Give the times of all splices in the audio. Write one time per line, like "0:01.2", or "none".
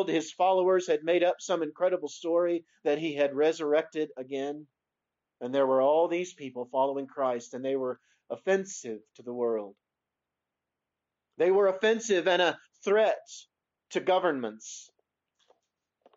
none